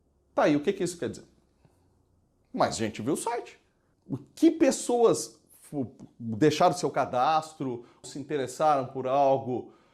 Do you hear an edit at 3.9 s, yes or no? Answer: yes